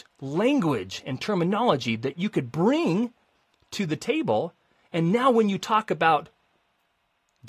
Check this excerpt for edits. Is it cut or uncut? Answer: uncut